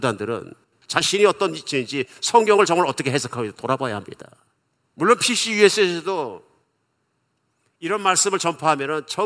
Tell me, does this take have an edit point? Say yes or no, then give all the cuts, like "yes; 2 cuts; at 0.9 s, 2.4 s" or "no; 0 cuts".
no; 0 cuts